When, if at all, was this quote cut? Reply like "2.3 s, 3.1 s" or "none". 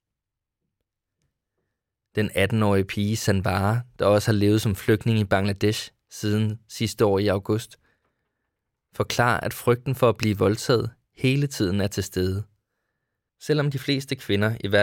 13.3 s